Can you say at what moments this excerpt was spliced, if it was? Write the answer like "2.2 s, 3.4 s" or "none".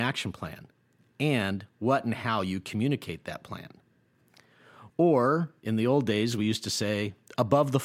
4.9 s

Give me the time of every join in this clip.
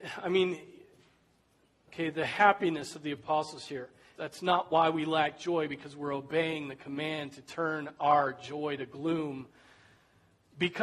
1.9 s, 4.2 s

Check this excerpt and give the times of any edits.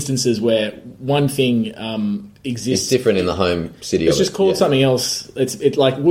none

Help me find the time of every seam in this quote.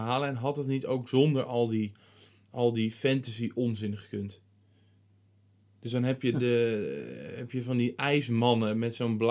6.3 s

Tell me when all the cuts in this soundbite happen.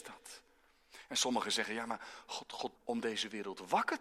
2.8 s

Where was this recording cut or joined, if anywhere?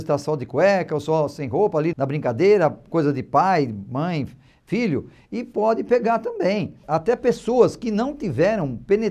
1.9 s

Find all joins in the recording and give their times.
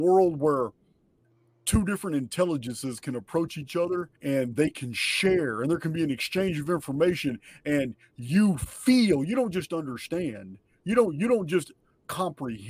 4.1 s

